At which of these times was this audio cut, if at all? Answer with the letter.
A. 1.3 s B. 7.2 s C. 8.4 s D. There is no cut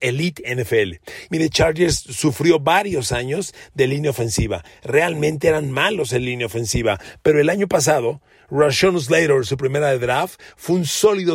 A